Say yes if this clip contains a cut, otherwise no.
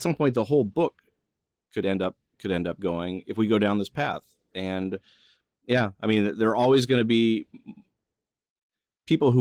no